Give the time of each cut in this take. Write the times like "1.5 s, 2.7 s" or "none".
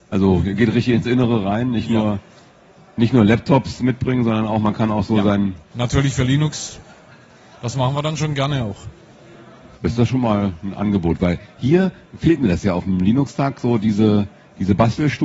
5.7 s